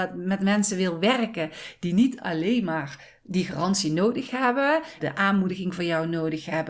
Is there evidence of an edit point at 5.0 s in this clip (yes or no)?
yes